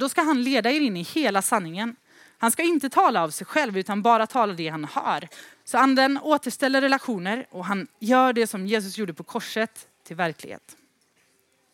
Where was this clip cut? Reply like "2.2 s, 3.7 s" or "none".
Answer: 5.5 s

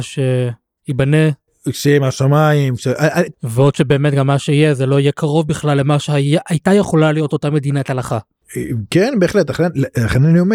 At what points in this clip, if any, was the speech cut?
3.3 s

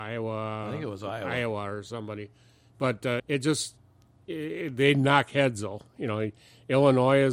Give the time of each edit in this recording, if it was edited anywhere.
3.2 s

